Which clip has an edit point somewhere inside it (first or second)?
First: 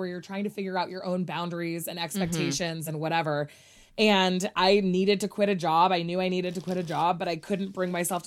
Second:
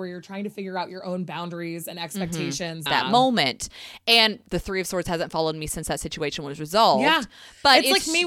second